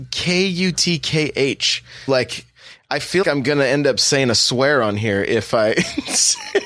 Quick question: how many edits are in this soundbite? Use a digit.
2